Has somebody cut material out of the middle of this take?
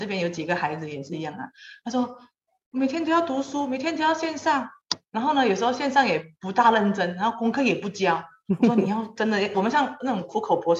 no; 0 cuts

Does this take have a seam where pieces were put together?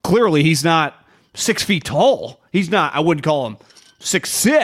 no; 0 cuts

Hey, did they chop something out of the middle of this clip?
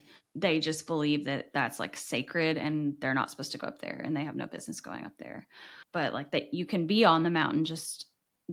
no; 0 cuts

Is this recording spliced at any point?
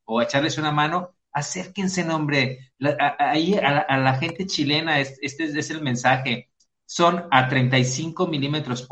no; 0 cuts

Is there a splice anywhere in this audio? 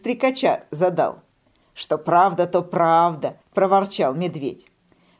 yes; 1 cut; at 3.4 s

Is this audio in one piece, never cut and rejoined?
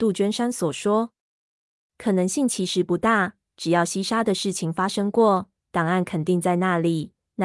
yes; 0 cuts

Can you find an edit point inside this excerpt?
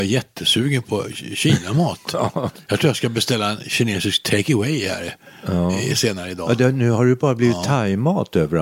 no; 0 cuts

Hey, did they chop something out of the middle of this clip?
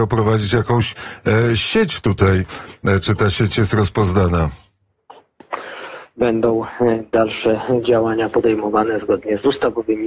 yes; 1 cut; at 6.1 s

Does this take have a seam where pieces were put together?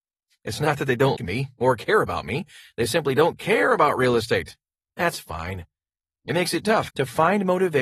yes; 2 cuts; at 1.2 s, 6.9 s

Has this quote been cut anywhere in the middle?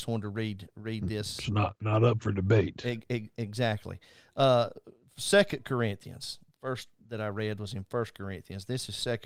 no; 0 cuts

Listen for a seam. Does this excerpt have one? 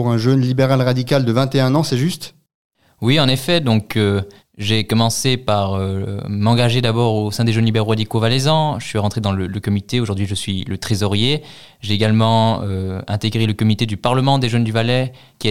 no; 0 cuts

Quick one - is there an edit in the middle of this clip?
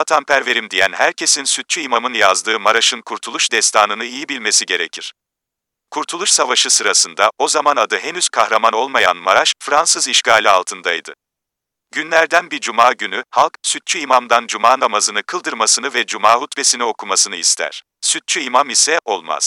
yes; 1 cut; at 17.9 s

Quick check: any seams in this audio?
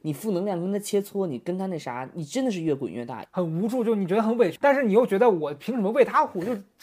yes; 2 cuts; at 3.3 s, 4.6 s

